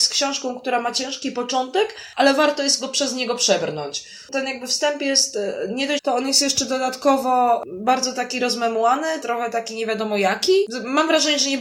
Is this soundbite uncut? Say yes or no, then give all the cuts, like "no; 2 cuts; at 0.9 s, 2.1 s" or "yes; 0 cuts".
no; 2 cuts; at 6.0 s, 9.2 s